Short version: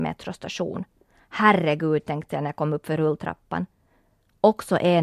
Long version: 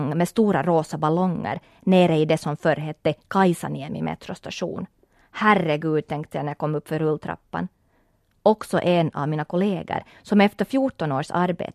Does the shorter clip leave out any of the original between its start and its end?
no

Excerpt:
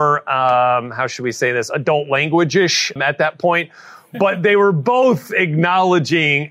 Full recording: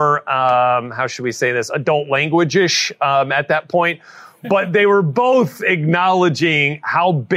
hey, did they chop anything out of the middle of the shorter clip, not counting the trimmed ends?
yes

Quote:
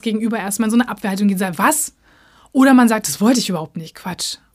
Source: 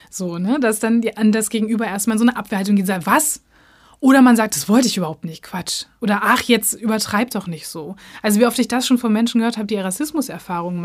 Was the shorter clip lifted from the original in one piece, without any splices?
yes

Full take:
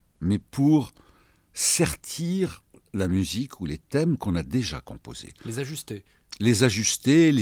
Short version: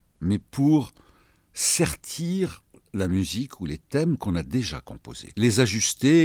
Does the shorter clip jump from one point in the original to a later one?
yes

